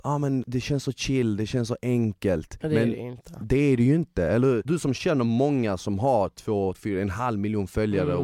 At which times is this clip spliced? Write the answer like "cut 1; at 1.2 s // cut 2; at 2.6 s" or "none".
cut 1; at 6.7 s